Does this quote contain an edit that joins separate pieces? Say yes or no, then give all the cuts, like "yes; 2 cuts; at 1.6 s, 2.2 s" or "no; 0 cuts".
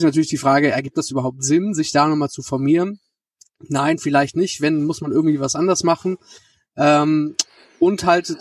no; 0 cuts